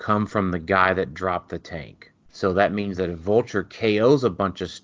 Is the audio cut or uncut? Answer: cut